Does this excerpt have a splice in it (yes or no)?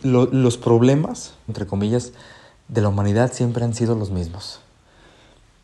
yes